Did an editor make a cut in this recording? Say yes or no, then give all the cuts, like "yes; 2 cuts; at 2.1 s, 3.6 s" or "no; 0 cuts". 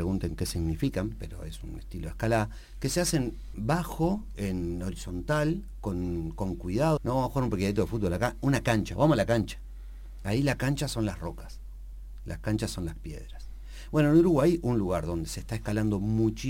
yes; 1 cut; at 7.0 s